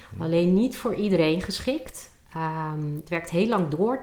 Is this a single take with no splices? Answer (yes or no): yes